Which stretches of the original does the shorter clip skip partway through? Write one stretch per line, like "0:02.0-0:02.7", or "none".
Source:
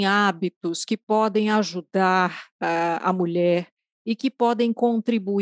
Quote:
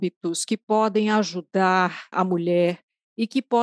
0:02.5-0:03.0